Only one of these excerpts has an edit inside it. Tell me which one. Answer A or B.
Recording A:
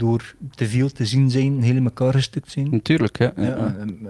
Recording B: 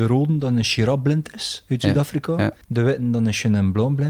B